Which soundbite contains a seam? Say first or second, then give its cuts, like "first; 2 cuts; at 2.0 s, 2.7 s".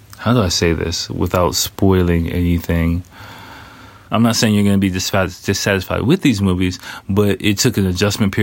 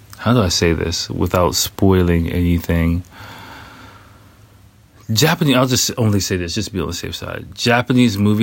first; 1 cut; at 4.1 s